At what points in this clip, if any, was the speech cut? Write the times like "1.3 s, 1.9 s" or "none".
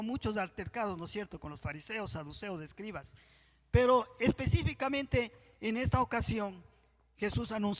none